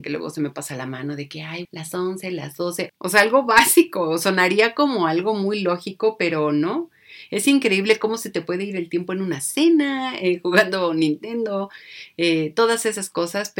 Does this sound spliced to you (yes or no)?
yes